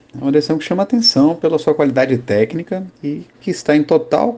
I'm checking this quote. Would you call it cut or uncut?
cut